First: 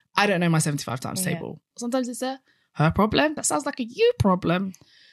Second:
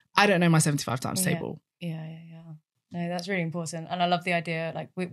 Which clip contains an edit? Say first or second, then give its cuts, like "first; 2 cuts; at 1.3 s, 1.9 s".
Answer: first; 2 cuts; at 1.7 s, 3.4 s